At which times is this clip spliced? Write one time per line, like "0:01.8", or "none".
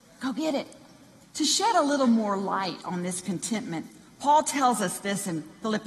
0:01.2